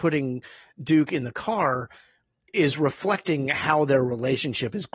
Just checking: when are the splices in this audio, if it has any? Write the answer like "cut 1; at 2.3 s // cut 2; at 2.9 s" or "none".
none